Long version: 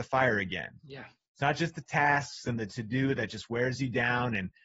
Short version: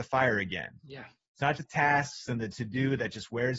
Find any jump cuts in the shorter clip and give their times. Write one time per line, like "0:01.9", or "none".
0:01.6